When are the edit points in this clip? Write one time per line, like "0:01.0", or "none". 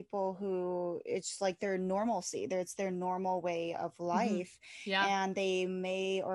none